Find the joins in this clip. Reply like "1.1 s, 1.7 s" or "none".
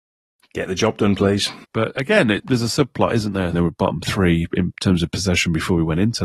1.6 s, 3.5 s